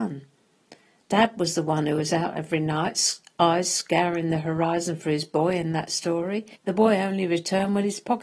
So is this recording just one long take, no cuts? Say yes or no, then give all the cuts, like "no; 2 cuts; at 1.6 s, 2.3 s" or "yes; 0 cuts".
no; 1 cut; at 6.6 s